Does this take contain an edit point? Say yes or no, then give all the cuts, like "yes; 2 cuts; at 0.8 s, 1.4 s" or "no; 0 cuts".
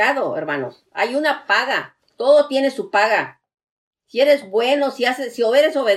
no; 0 cuts